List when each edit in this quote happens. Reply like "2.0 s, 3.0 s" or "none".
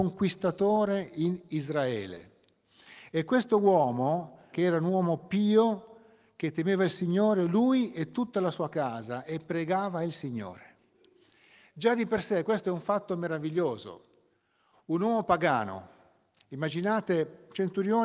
4.5 s

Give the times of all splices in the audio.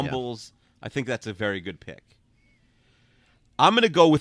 none

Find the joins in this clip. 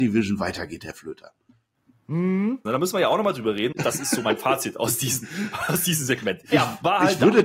2.7 s, 3.7 s, 6.5 s

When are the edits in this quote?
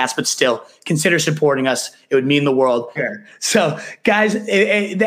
3.0 s

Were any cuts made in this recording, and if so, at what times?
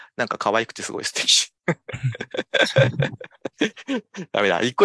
none

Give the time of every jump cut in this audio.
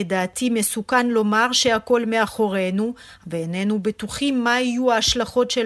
3.2 s

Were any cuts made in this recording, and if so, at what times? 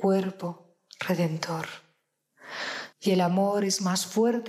2.9 s

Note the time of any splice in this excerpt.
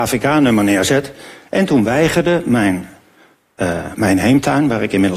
3.9 s

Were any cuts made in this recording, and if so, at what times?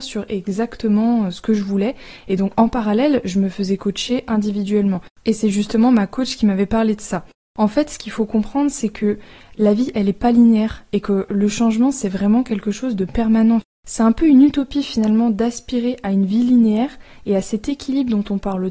none

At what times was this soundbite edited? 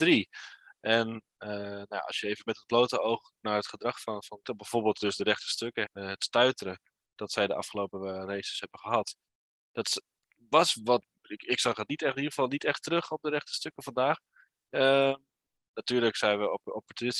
4.4 s, 5.9 s

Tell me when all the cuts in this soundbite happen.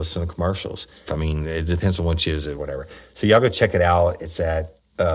1.1 s, 2.5 s

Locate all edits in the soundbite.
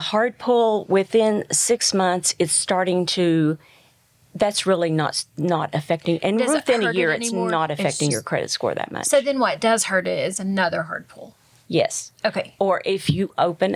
none

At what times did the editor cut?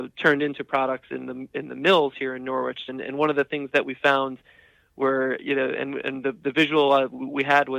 2.9 s

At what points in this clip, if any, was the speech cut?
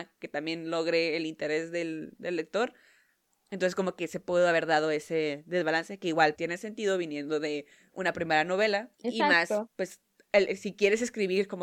6.3 s, 8.9 s

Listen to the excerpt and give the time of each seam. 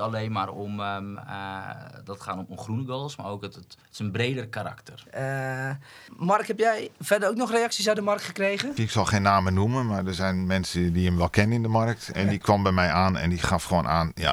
3.8 s, 5.1 s, 8.8 s

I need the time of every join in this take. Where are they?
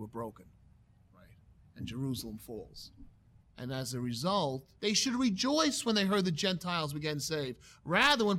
3.5 s, 4.8 s

